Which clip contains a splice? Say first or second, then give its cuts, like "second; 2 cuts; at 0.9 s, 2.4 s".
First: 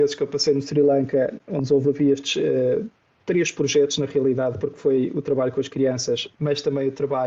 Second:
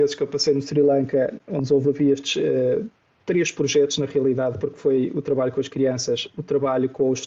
first; 1 cut; at 6.3 s